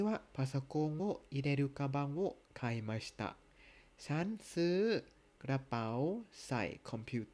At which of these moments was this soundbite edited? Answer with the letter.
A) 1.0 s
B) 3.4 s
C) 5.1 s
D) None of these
D